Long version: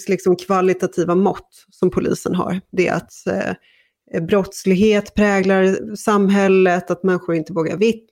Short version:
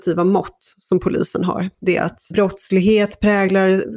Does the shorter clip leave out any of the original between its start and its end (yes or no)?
yes